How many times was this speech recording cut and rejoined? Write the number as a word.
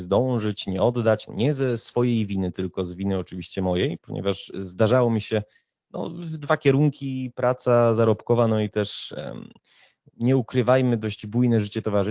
one